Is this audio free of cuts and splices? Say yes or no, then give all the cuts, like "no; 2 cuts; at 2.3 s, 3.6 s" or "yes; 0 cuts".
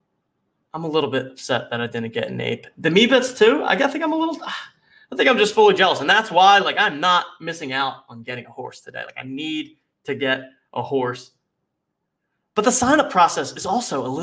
yes; 0 cuts